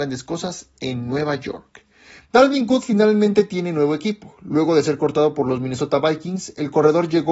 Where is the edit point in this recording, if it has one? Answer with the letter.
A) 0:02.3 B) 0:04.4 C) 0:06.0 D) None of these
A